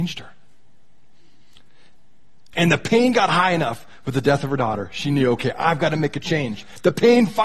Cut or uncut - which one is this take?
cut